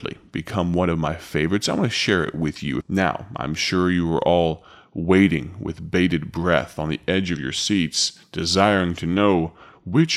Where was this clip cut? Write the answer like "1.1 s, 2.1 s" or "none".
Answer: 2.8 s